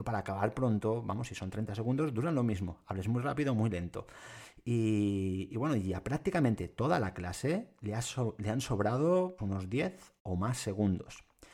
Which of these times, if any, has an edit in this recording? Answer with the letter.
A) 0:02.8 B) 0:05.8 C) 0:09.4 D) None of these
C